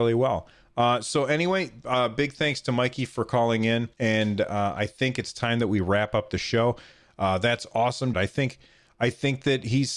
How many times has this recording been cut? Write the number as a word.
three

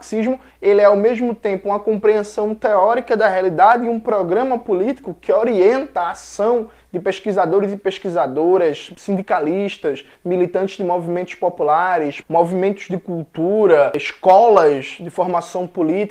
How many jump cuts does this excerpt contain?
one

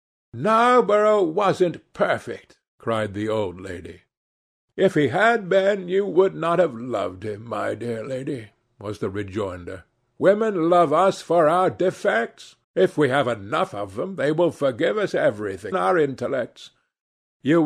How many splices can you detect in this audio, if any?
two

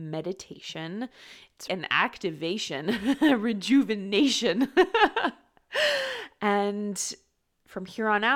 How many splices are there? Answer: one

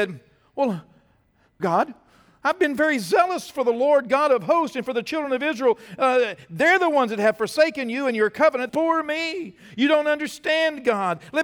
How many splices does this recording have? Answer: two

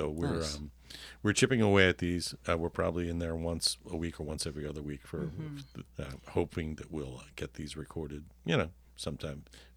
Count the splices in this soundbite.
one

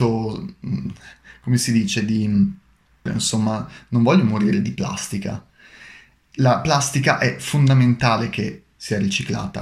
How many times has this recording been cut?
two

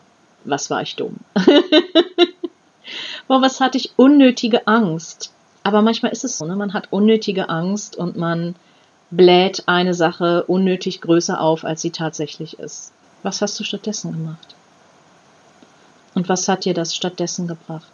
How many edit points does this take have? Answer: two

